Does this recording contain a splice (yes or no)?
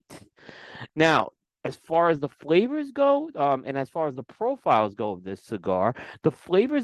no